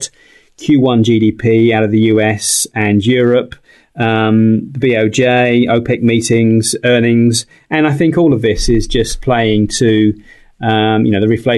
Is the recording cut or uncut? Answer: uncut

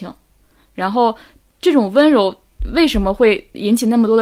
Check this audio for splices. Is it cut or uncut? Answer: uncut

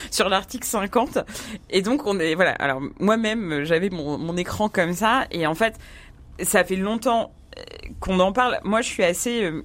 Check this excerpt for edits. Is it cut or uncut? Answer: uncut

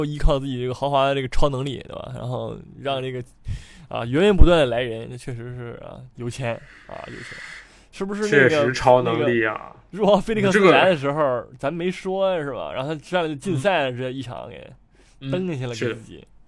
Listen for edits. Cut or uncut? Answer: uncut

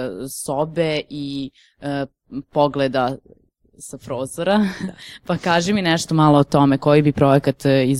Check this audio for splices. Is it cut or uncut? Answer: uncut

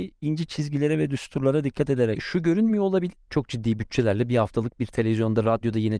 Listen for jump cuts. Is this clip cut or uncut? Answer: cut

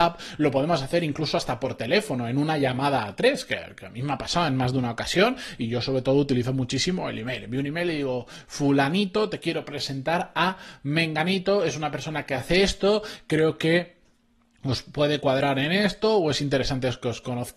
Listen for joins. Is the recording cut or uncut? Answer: uncut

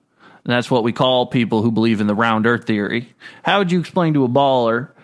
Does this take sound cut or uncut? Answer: uncut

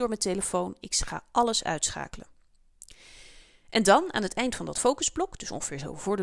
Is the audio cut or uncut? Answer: uncut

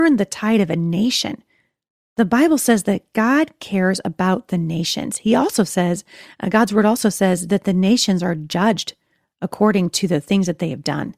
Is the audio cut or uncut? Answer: uncut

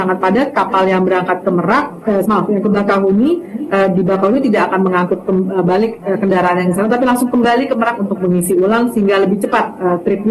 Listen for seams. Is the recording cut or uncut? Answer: cut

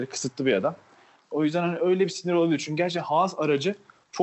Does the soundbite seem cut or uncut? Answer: cut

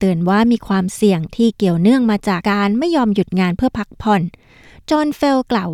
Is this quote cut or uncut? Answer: cut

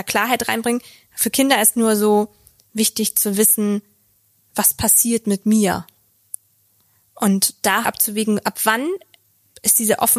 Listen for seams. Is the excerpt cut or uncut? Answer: cut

